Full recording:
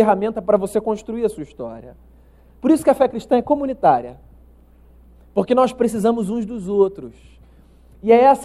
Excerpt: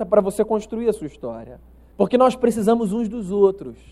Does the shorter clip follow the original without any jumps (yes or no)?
no